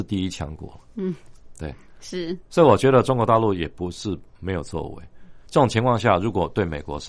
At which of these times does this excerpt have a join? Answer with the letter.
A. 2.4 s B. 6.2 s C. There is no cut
C